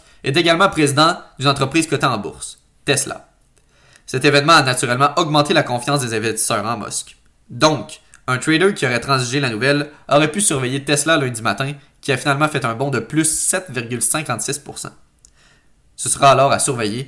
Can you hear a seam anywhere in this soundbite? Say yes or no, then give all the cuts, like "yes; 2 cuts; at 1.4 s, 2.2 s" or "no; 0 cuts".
no; 0 cuts